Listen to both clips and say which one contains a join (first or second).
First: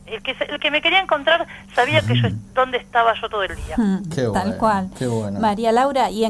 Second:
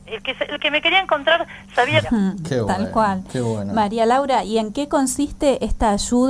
second